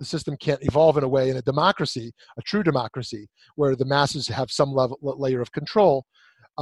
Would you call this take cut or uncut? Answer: uncut